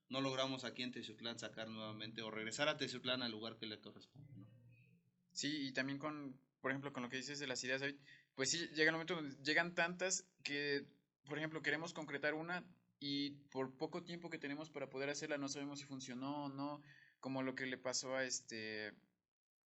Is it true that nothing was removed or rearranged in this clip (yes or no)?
yes